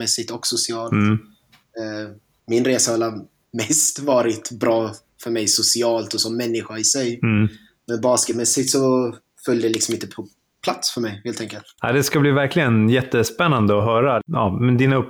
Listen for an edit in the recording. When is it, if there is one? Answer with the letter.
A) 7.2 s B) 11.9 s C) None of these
C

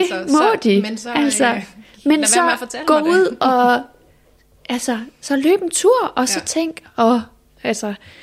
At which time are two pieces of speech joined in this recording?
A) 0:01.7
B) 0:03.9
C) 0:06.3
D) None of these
D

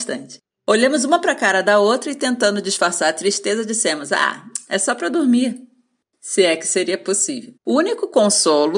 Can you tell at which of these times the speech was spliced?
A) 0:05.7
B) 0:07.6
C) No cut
B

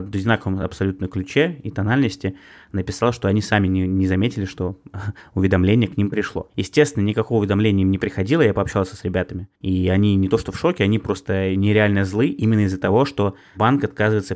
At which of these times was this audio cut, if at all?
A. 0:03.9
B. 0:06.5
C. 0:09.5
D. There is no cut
C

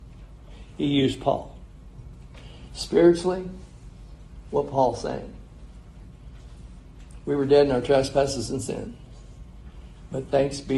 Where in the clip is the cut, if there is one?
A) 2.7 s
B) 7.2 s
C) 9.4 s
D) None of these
D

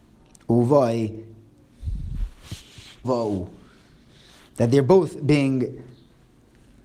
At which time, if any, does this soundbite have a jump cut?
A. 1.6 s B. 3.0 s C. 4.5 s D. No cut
B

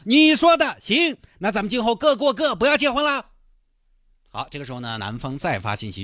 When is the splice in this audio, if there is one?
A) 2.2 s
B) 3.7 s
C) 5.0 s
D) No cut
D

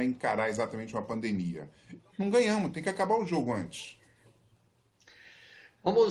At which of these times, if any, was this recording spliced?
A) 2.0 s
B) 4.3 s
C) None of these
A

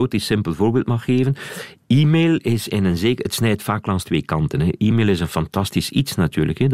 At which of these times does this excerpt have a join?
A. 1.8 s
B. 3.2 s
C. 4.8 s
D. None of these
D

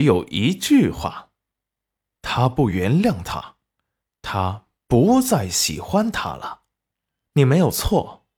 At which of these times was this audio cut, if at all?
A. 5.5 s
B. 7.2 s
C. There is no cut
B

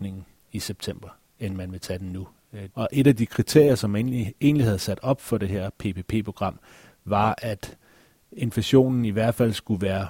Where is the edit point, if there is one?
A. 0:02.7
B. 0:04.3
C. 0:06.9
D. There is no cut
A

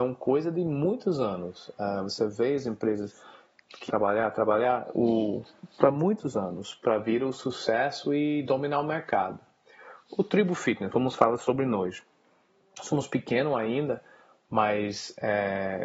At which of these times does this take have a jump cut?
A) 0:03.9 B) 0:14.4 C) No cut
A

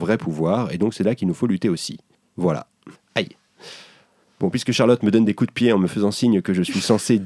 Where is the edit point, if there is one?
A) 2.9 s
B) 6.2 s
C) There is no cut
A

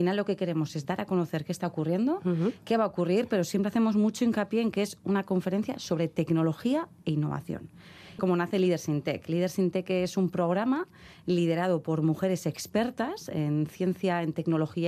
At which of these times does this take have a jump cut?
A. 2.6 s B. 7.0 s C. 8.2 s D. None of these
C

